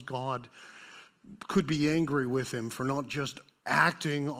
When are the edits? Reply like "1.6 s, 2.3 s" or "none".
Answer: none